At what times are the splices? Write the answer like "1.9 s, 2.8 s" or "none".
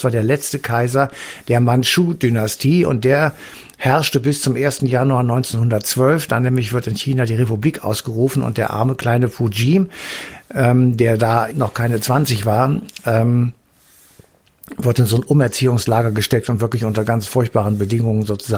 11.5 s